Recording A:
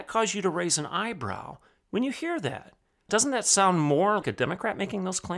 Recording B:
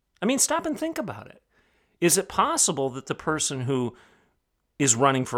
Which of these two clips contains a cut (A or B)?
A